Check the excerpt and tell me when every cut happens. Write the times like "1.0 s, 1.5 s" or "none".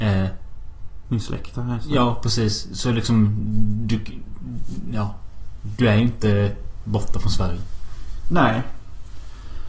none